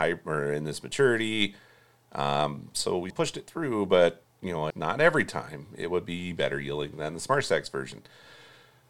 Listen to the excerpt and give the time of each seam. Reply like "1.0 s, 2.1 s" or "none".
3.1 s, 4.7 s